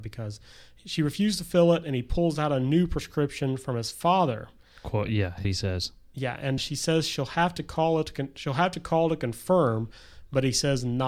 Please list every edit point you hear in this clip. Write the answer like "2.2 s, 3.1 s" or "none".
5.4 s, 6.6 s